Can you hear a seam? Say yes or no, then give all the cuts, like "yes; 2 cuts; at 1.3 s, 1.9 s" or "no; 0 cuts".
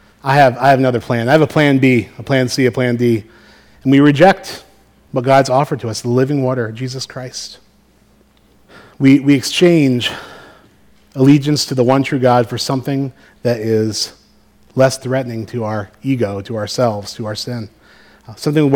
no; 0 cuts